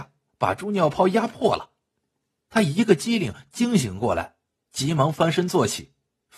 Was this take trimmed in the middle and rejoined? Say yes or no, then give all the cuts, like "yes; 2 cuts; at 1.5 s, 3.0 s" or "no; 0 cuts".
no; 0 cuts